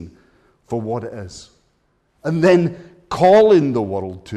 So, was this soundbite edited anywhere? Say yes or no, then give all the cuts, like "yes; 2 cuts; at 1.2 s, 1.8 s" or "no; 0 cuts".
no; 0 cuts